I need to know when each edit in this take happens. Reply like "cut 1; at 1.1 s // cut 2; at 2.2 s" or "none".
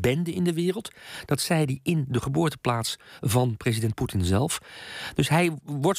none

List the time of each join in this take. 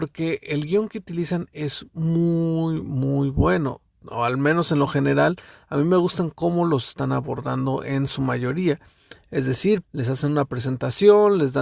cut 1; at 9.8 s

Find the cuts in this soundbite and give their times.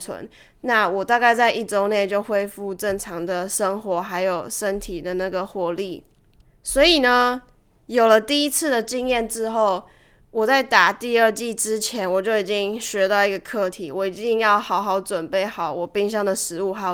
none

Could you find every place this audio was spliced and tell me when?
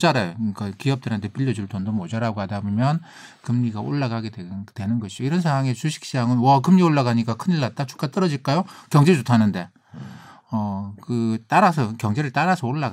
none

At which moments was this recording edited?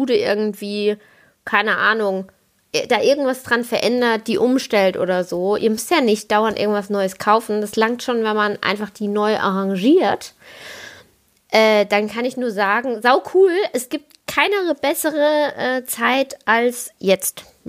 none

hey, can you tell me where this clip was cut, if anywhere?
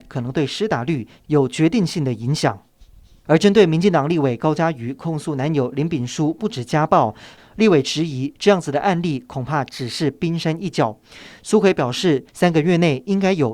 cut 1; at 3.3 s // cut 2; at 7.4 s // cut 3; at 12.3 s

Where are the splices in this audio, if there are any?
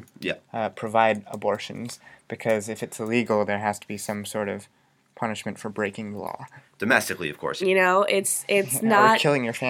cut 1; at 6.6 s // cut 2; at 7.6 s

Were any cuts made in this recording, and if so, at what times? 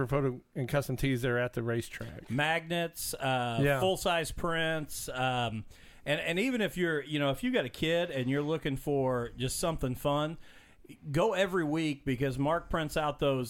none

